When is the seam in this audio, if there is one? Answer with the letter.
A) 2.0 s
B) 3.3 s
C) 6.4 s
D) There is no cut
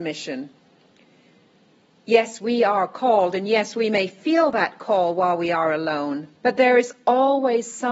C